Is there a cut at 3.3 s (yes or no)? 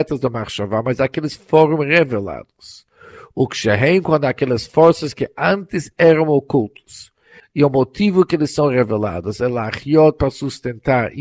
no